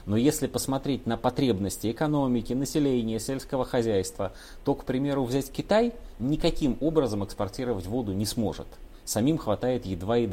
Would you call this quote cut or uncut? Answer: uncut